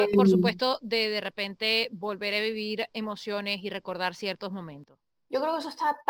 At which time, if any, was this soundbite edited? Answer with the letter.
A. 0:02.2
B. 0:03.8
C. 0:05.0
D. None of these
D